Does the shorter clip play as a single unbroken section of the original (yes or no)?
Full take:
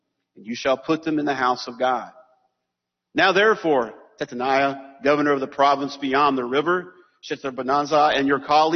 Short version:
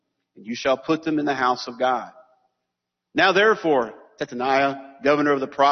yes